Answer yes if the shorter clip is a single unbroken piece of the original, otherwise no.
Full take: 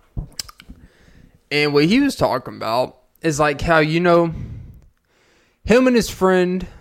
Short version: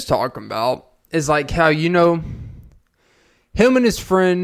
yes